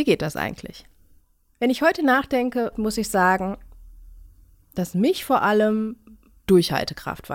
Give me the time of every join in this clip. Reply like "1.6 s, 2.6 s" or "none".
2.7 s